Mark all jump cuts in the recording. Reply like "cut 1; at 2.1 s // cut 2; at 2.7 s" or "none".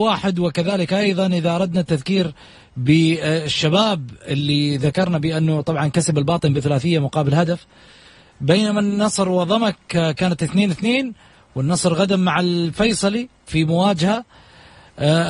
none